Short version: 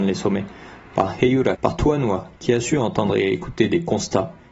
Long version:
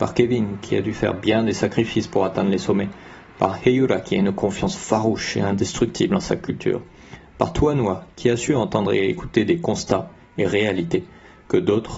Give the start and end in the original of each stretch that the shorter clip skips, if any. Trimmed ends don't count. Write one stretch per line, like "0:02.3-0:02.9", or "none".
0:04.0-0:07.3